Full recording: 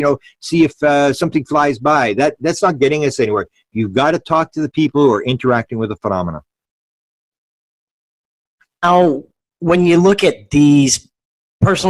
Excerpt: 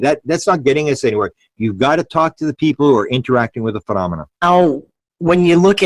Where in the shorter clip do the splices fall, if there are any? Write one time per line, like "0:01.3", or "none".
0:04.3